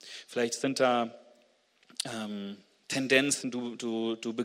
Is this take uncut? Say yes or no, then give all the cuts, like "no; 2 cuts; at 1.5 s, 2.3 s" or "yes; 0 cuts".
yes; 0 cuts